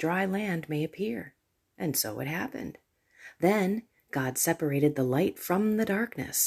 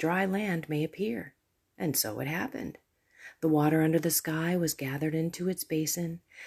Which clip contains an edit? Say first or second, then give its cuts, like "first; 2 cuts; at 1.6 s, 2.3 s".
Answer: first; 1 cut; at 3.4 s